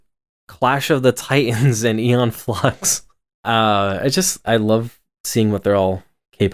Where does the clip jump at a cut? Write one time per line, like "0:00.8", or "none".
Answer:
0:03.3